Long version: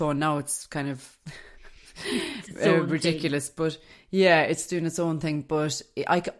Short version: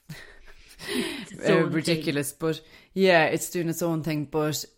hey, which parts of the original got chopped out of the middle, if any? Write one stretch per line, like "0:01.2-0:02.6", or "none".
none